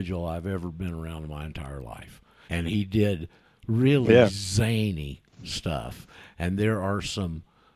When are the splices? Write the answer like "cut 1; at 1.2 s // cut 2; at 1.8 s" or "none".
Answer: cut 1; at 2.5 s